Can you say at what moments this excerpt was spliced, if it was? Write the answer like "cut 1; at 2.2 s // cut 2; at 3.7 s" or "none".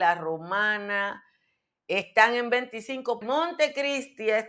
cut 1; at 3.2 s